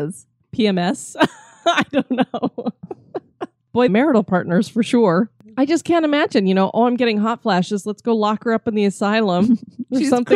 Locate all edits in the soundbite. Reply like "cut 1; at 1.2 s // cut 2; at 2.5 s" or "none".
cut 1; at 3.9 s